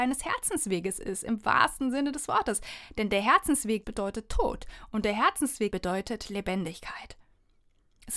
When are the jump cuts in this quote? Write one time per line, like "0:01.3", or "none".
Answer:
0:03.8
0:05.7